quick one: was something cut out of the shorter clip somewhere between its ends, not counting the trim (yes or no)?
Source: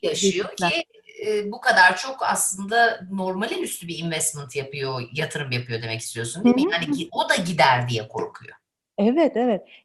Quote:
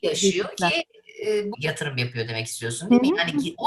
yes